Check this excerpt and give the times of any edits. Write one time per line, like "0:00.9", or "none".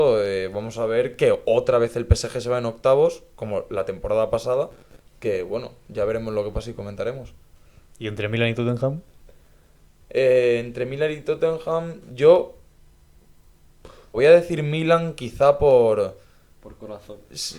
0:14.1